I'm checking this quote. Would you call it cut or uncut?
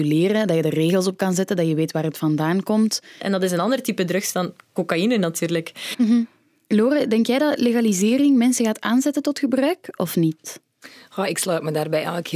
cut